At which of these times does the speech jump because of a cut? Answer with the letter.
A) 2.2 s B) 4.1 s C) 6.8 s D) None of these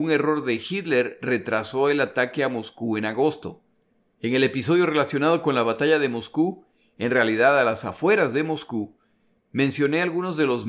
B